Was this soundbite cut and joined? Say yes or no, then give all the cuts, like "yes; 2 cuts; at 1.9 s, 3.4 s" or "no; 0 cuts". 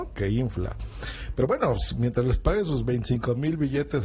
no; 0 cuts